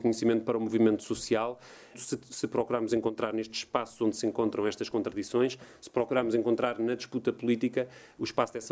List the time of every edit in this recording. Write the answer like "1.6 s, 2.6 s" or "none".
1.9 s